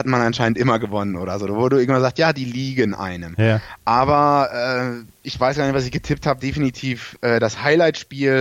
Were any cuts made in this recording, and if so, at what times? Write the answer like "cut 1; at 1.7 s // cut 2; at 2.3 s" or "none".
cut 1; at 5.2 s // cut 2; at 6.4 s